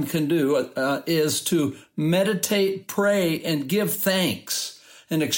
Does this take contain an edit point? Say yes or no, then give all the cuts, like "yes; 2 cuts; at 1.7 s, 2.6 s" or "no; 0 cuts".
no; 0 cuts